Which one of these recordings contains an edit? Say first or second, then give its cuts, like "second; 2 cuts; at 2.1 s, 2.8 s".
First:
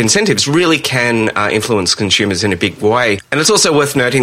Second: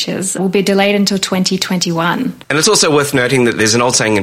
second; 1 cut; at 2.4 s